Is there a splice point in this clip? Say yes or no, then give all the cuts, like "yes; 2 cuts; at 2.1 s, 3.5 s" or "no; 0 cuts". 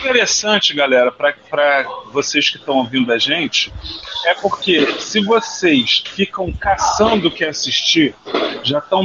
yes; 1 cut; at 6.0 s